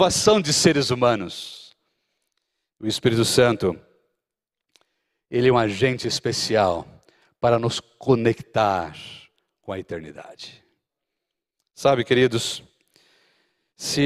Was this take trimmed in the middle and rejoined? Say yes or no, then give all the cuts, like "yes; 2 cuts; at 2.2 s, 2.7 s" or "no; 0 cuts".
no; 0 cuts